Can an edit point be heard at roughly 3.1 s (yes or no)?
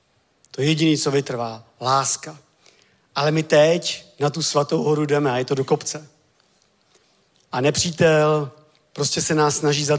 no